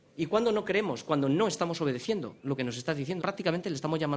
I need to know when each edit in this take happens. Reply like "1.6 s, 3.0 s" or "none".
3.2 s